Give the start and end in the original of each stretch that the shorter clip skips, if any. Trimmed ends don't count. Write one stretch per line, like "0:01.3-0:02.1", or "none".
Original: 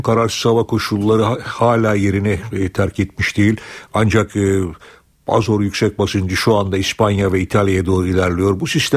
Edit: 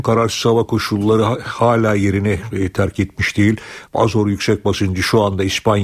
0:03.9-0:05.2